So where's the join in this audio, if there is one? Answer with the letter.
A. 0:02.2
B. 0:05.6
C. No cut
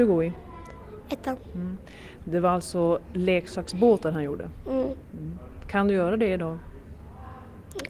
A